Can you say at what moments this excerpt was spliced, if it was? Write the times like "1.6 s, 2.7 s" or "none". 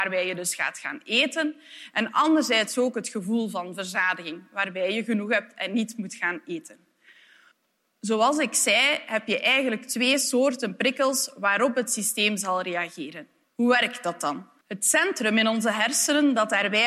13.5 s, 14.6 s